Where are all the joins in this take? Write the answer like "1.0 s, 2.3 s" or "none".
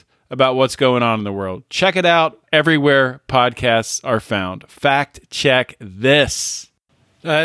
none